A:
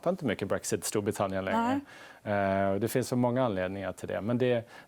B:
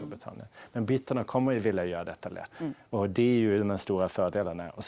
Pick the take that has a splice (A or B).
B